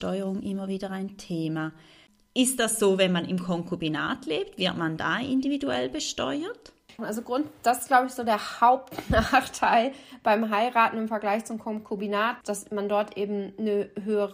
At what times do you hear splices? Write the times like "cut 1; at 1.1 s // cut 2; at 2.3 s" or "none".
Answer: cut 1; at 7.0 s // cut 2; at 12.4 s